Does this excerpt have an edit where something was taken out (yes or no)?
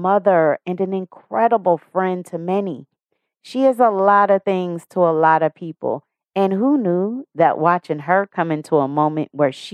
no